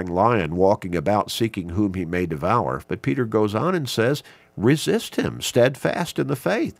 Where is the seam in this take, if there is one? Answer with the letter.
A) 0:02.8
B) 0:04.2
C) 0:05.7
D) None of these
A